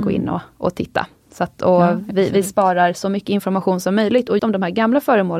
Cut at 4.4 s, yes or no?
yes